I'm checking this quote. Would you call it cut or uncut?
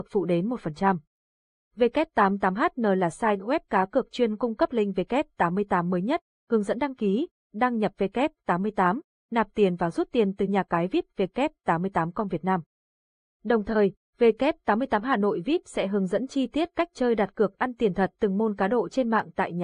uncut